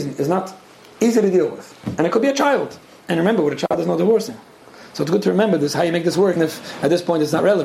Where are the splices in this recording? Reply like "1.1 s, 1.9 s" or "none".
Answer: 6.4 s